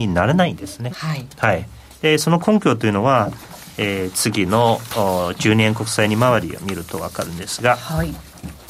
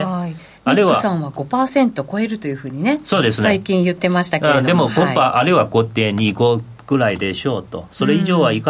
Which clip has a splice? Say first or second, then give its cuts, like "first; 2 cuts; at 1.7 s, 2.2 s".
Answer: first; 1 cut; at 0.9 s